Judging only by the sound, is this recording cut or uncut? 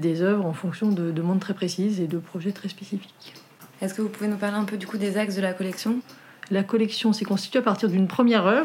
cut